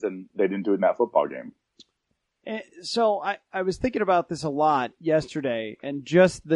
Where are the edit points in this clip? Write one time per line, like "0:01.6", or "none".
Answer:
none

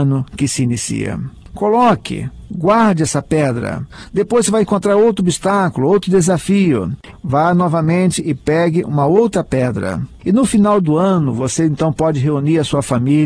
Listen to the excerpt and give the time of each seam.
0:01.5
0:07.1

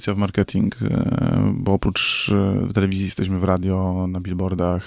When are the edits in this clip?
none

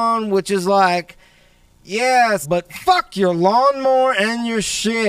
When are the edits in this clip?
0:02.4

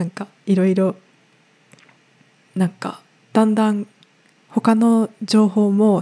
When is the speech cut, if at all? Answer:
none

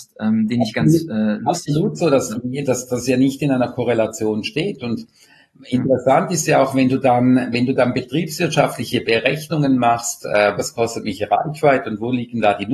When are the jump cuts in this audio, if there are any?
0:10.6

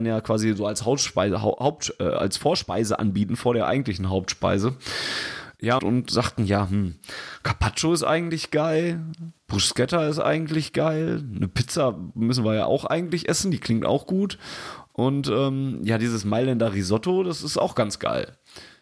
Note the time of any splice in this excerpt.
0:05.8

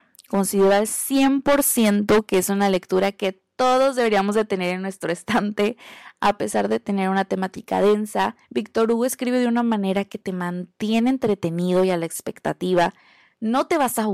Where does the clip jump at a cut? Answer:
0:08.4

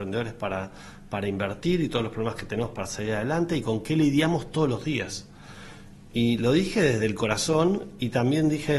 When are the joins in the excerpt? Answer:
none

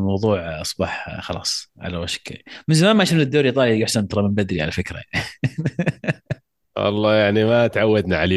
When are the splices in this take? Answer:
none

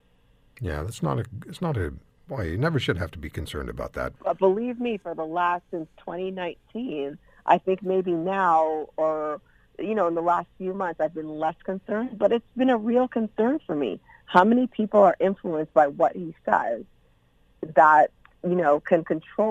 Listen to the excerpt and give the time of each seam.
0:04.2

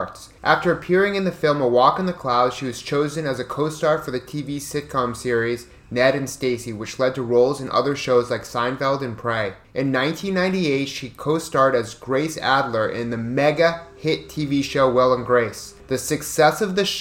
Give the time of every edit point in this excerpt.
none

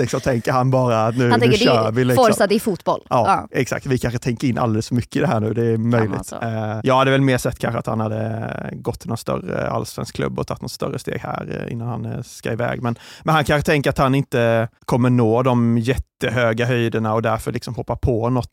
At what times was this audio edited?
0:06.8
0:14.8

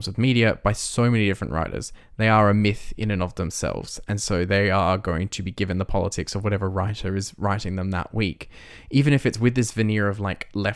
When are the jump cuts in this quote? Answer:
none

